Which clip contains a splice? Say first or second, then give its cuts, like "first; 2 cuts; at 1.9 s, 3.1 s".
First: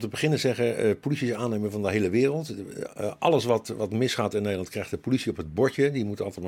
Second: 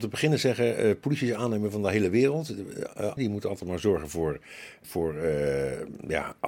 second; 2 cuts; at 3.2 s, 4.8 s